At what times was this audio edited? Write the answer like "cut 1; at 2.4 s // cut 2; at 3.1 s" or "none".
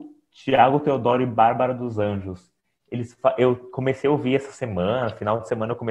none

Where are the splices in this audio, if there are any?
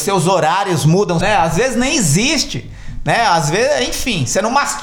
cut 1; at 1.2 s

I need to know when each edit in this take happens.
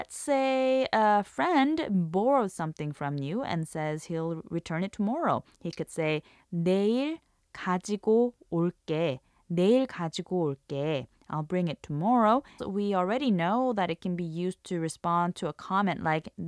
cut 1; at 12.6 s

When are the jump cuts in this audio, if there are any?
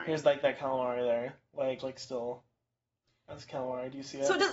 cut 1; at 1.8 s

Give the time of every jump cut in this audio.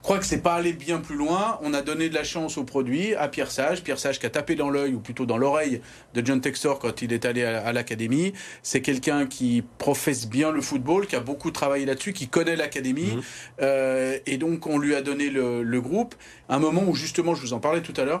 cut 1; at 16.4 s

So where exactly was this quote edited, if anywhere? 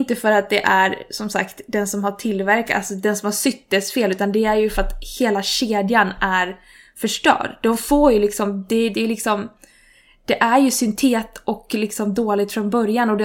cut 1; at 8.9 s

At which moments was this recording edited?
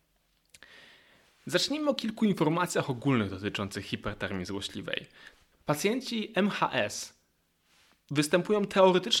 cut 1; at 5.5 s

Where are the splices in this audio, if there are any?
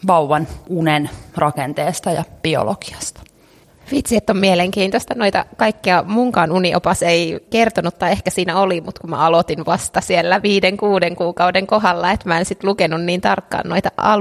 none

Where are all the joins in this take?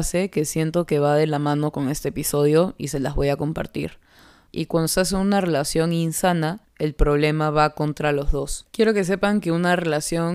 cut 1; at 4.5 s // cut 2; at 6.6 s

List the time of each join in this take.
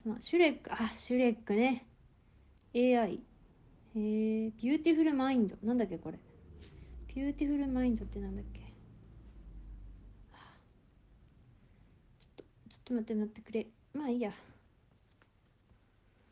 none

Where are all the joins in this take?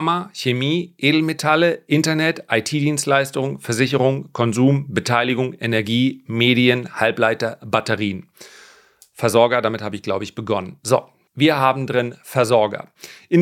cut 1; at 11.3 s

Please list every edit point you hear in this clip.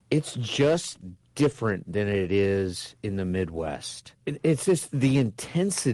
cut 1; at 4.1 s

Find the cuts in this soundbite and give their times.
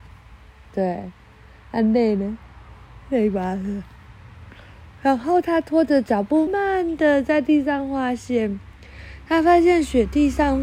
cut 1; at 6.5 s

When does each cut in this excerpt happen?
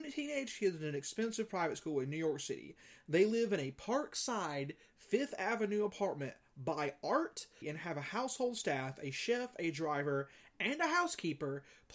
cut 1; at 7.6 s

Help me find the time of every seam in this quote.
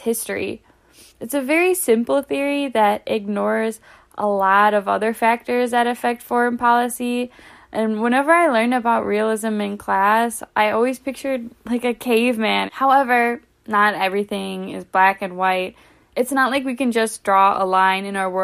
cut 1; at 12.7 s

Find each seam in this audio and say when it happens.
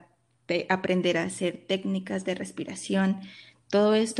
none

